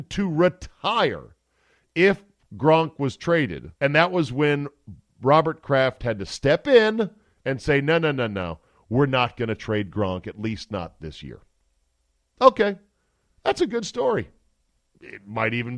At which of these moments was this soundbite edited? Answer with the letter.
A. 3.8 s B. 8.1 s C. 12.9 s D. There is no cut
A